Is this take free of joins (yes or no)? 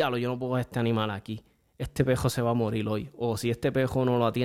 yes